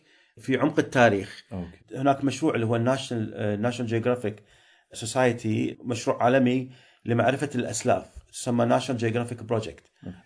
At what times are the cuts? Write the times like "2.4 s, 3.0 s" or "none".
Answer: 1.8 s